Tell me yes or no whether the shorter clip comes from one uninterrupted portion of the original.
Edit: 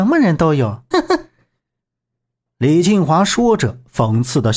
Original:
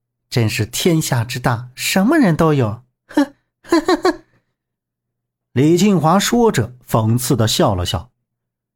no